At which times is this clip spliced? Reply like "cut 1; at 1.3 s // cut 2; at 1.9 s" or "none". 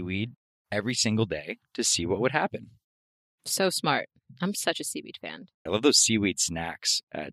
cut 1; at 5.7 s